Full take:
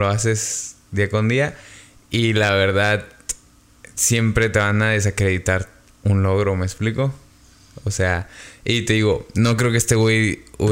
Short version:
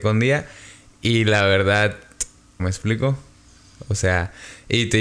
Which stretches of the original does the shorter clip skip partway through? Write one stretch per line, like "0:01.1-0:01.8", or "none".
0:03.7-0:06.6